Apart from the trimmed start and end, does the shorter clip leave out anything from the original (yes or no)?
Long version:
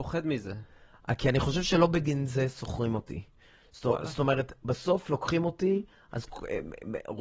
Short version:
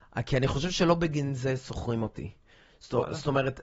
no